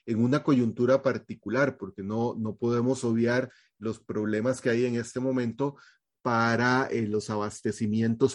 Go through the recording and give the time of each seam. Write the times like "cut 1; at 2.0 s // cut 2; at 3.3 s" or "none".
none